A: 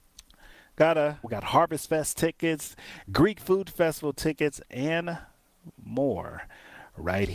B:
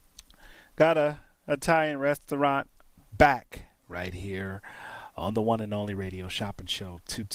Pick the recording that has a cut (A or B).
A